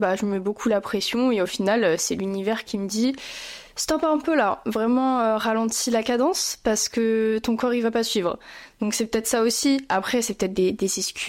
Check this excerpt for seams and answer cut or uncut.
uncut